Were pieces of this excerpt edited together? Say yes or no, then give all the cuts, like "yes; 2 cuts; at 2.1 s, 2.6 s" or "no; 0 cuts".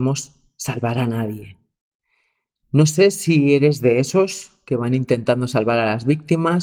no; 0 cuts